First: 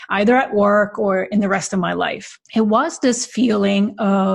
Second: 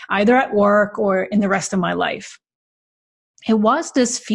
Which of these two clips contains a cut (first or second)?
first